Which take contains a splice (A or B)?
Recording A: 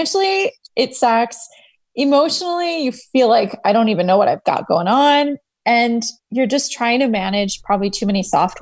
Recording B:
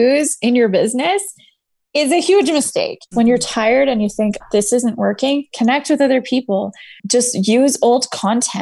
B